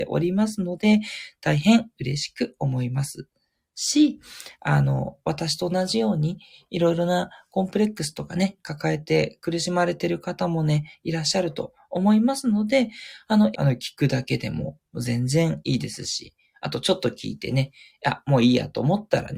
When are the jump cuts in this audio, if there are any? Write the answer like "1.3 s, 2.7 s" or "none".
13.5 s